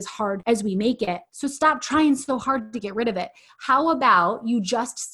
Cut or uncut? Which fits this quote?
cut